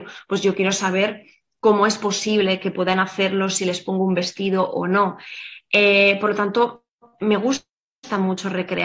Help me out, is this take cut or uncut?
uncut